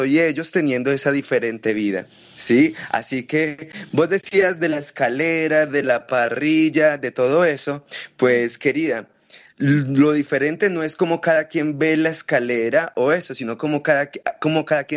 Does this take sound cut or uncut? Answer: uncut